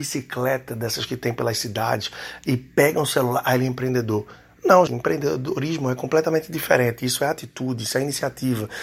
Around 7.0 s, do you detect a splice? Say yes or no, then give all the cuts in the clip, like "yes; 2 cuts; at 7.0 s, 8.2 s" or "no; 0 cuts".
no; 1 cut; at 4.9 s